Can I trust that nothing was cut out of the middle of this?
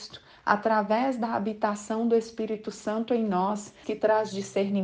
no; 1 cut; at 3.8 s

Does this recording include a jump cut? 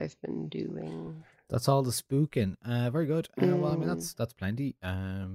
no; 0 cuts

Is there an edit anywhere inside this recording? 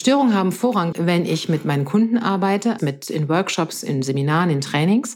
yes; 2 cuts; at 0.9 s, 2.8 s

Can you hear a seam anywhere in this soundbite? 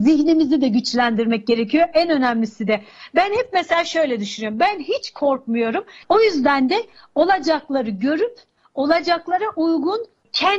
yes; 1 cut; at 6.0 s

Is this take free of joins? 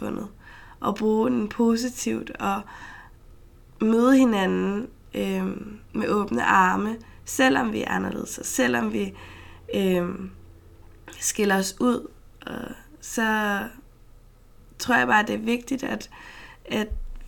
no; 1 cut; at 5.8 s

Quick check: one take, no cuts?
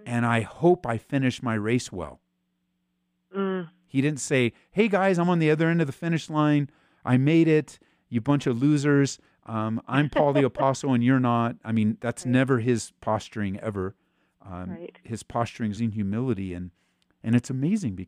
no; 1 cut; at 15.8 s

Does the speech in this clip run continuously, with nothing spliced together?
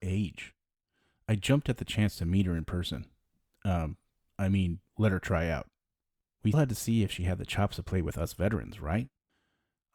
no; 2 cuts; at 4.9 s, 6.5 s

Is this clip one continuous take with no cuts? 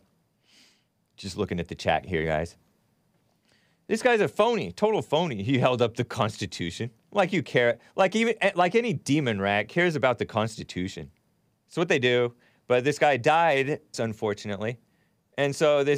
no; 2 cuts; at 11.5 s, 13.9 s

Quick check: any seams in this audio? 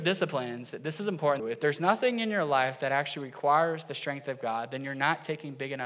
yes; 1 cut; at 1.4 s

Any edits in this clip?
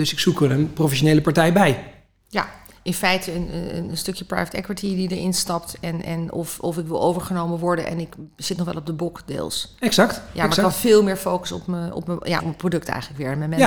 yes; 1 cut; at 12.4 s

